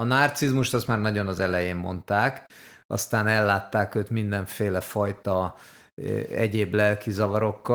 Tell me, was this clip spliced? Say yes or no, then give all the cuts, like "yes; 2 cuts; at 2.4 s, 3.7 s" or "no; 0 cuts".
no; 0 cuts